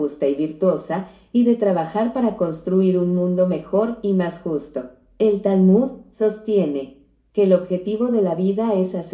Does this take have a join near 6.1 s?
yes; 1 cut; at 6.1 s

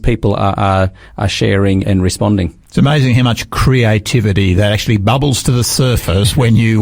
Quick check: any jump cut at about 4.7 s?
no; 1 cut; at 1.8 s

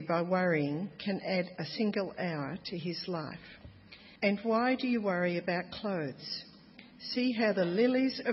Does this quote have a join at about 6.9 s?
no; 1 cut; at 4.2 s

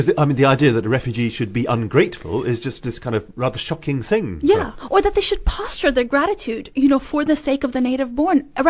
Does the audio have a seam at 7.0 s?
no; 0 cuts

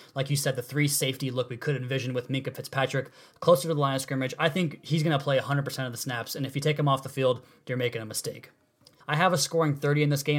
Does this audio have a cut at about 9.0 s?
yes; 1 cut; at 9.0 s

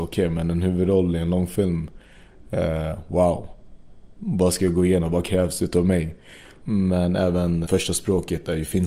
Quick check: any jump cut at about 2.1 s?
no; 3 cuts; at 4.1 s, 6.6 s, 7.7 s

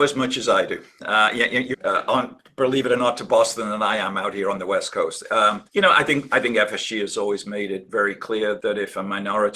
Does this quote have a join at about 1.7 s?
yes; 3 cuts; at 1.7 s, 5.7 s, 8.6 s

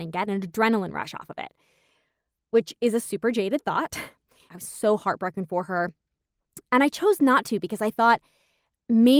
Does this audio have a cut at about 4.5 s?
yes; 1 cut; at 4.5 s

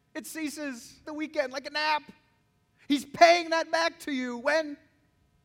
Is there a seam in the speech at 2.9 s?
no; 1 cut; at 1.0 s

